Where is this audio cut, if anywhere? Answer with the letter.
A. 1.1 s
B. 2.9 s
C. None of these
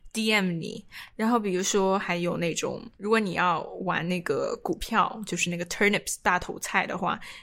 B